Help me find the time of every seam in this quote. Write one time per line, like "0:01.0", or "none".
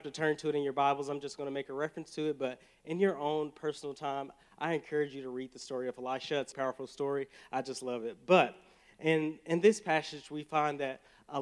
0:06.5